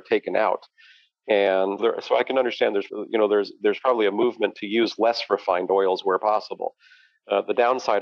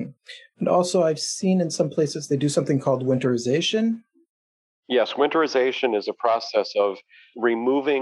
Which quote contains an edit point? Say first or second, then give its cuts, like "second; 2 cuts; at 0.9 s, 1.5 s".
first; 2 cuts; at 1.8 s, 2.9 s